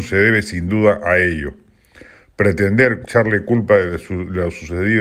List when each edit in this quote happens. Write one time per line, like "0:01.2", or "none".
0:03.0